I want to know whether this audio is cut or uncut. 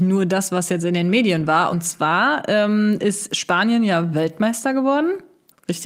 uncut